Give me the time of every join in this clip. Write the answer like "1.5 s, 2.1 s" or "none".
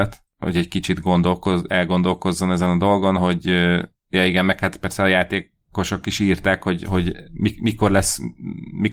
none